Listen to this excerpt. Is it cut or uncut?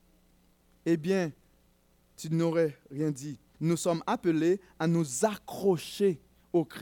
cut